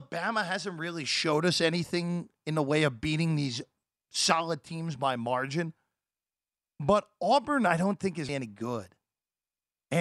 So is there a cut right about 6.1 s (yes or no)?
no